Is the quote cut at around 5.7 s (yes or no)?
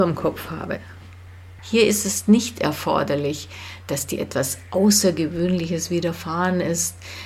no